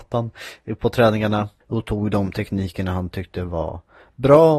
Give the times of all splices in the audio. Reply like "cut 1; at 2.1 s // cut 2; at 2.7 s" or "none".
cut 1; at 1.6 s

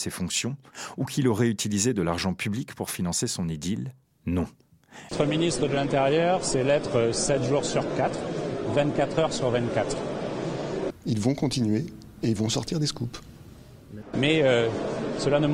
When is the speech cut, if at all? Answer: cut 1; at 5.1 s // cut 2; at 10.9 s // cut 3; at 14.1 s

